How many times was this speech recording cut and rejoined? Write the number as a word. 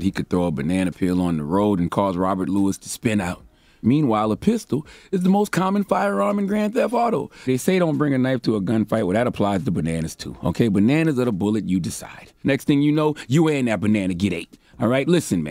three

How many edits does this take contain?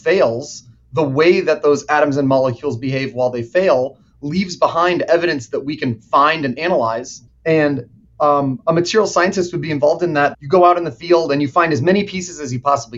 two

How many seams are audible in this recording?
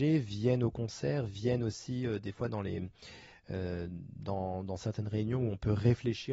zero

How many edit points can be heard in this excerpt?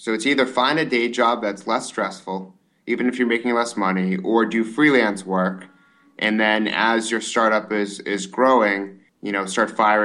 one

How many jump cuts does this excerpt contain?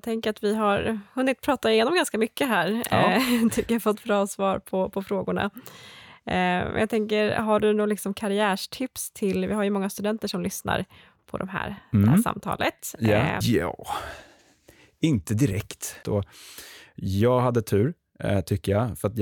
two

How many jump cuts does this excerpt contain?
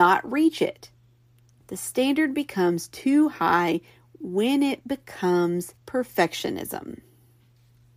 two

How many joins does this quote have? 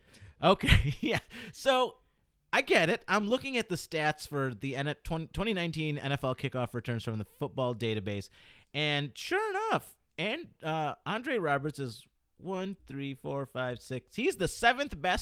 one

